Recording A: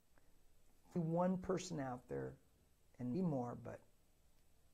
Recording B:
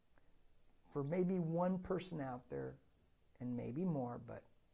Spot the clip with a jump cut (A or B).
A